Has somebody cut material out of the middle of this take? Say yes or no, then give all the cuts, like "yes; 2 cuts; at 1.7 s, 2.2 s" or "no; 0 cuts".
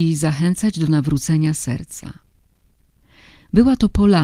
no; 0 cuts